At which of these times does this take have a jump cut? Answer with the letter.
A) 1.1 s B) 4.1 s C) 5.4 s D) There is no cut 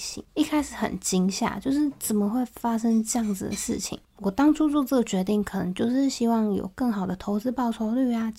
D